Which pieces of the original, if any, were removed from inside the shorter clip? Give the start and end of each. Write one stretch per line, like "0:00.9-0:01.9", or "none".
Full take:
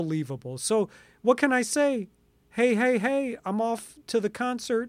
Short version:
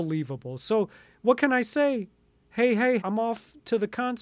0:03.0-0:03.4